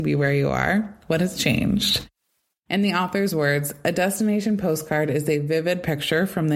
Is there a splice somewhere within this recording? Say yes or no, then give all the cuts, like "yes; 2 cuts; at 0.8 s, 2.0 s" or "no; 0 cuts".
no; 0 cuts